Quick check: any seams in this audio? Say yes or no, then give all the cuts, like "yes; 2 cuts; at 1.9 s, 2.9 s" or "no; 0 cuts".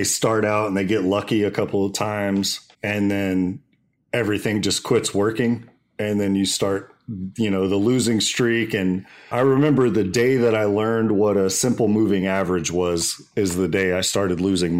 yes; 2 cuts; at 2.7 s, 9.3 s